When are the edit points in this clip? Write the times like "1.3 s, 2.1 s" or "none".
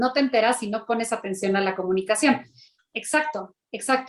2.8 s